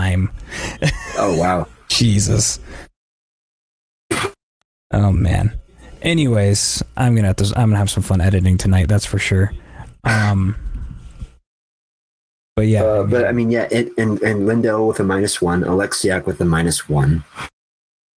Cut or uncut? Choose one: uncut